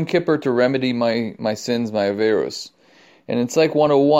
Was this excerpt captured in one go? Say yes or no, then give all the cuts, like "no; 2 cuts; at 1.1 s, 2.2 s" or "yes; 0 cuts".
yes; 0 cuts